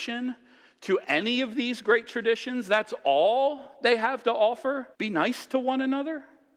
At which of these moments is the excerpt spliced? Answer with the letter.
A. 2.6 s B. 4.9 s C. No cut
B